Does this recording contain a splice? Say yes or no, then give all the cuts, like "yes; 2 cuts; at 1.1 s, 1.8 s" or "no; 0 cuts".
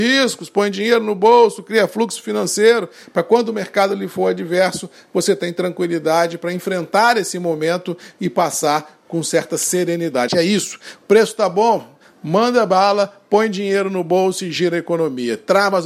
yes; 1 cut; at 10.3 s